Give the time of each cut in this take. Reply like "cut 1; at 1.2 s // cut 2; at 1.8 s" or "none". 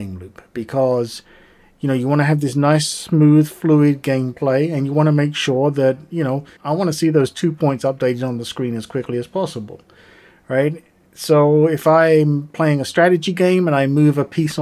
cut 1; at 6.6 s